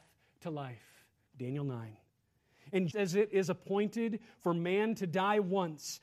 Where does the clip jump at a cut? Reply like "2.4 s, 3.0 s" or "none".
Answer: 1.3 s, 2.9 s